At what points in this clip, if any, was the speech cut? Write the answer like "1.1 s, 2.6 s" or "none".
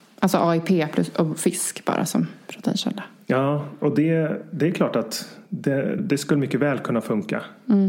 6.0 s